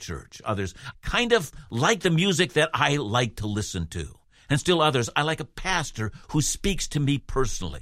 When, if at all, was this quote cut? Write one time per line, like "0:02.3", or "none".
0:00.9